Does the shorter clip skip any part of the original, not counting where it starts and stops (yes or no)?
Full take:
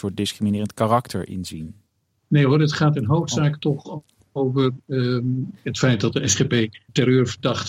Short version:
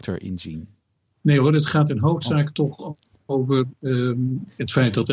no